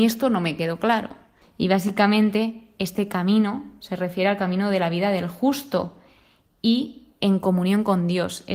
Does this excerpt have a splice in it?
yes; 1 cut; at 1.4 s

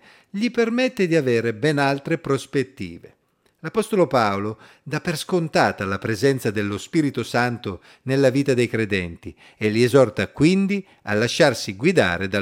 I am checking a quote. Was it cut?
no; 0 cuts

